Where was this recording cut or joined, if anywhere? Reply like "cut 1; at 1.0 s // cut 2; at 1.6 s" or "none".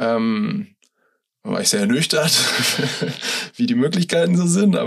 none

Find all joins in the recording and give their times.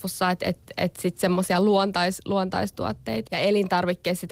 cut 1; at 3.3 s

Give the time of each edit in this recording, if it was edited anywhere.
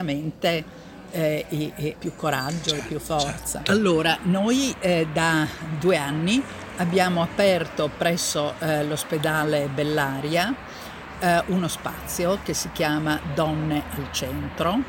cut 1; at 1.9 s // cut 2; at 3.6 s

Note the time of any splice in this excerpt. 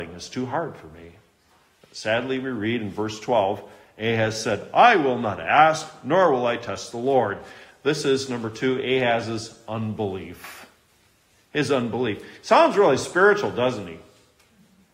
none

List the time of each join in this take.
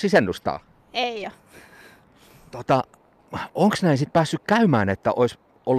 none

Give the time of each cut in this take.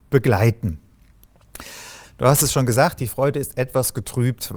cut 1; at 2.0 s

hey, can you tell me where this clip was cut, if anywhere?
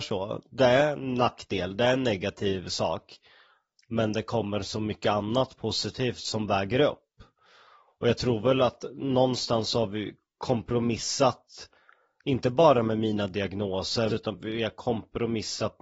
cut 1; at 14.1 s

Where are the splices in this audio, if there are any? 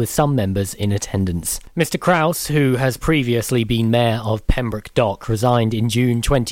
none

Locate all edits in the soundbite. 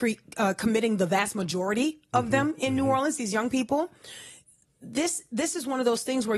none

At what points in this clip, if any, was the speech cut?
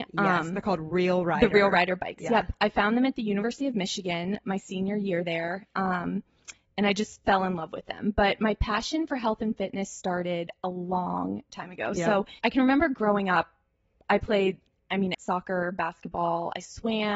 cut 1; at 12.4 s // cut 2; at 15.1 s

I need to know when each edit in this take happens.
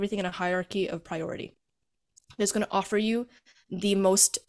none

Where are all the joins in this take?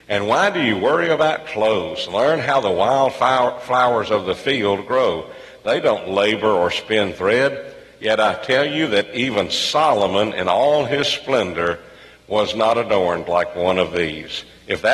none

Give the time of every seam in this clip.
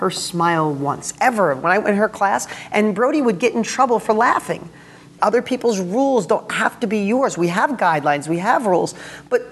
cut 1; at 5.2 s

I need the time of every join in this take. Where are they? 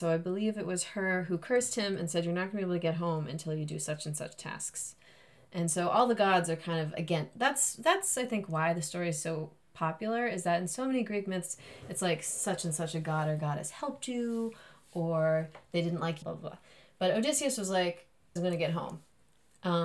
cut 1; at 16.2 s // cut 2; at 18.4 s

